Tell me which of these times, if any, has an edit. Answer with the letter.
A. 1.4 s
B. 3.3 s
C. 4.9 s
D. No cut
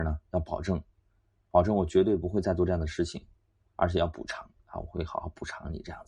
D